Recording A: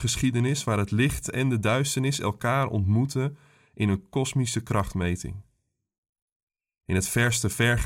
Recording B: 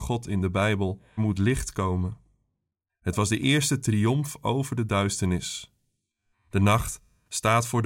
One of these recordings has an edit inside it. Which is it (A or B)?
B